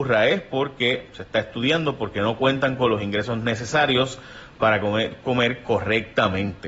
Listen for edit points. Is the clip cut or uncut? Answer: uncut